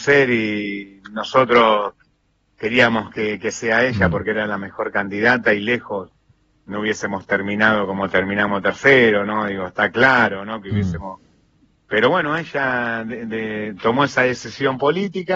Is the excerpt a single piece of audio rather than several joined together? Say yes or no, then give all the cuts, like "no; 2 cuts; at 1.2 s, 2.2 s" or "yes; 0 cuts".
yes; 0 cuts